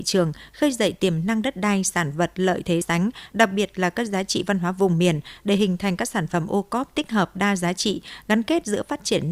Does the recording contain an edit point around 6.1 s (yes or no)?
no